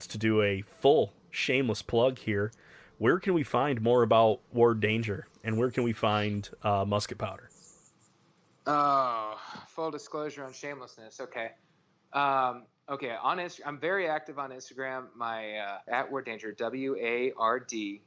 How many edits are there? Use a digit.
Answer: 1